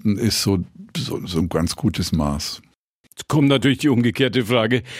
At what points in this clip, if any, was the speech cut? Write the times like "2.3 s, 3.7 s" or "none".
none